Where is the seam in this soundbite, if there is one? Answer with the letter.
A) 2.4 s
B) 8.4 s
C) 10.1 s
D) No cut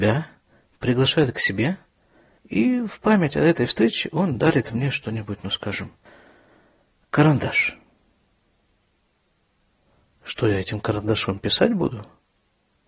A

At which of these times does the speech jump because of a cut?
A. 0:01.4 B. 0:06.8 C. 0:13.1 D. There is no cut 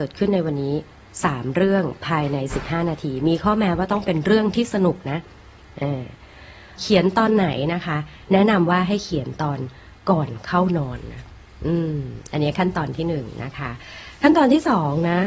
B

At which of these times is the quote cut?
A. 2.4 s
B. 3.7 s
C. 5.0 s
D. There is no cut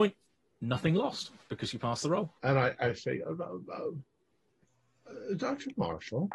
A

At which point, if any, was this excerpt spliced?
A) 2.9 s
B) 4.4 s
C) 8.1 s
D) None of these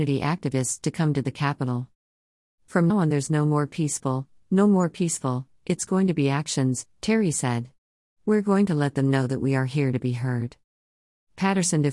A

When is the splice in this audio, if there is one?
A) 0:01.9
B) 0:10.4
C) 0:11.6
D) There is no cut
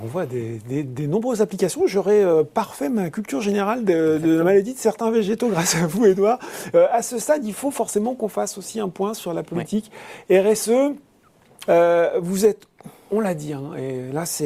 C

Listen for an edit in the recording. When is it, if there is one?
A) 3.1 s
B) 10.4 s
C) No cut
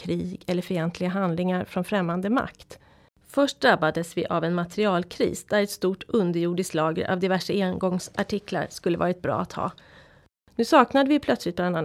A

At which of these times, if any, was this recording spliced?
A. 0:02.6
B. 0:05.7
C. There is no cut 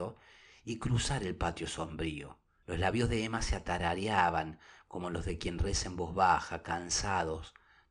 A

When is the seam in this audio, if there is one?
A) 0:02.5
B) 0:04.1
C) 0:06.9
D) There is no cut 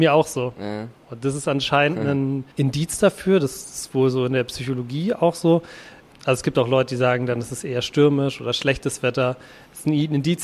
A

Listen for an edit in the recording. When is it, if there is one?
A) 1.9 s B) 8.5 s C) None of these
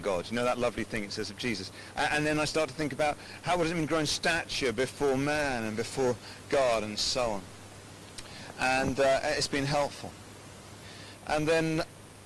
A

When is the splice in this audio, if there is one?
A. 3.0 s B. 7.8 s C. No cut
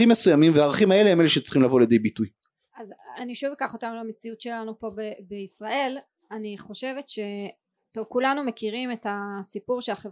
A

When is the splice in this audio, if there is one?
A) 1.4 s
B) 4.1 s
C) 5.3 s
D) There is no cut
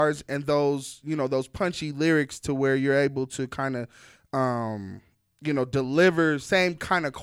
D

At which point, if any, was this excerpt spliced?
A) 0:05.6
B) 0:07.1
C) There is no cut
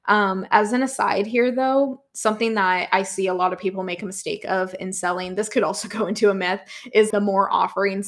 B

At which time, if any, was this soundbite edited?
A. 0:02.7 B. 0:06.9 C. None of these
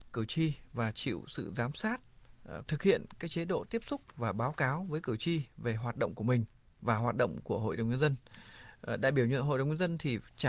A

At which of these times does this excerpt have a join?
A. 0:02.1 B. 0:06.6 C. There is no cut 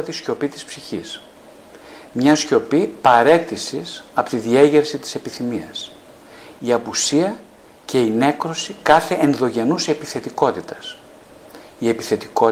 B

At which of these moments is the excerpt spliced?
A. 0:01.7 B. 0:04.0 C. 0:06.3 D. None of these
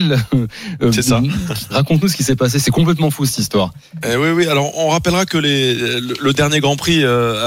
A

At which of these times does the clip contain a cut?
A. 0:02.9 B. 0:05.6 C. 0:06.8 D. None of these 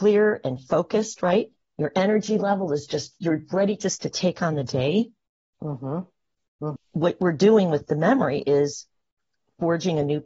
C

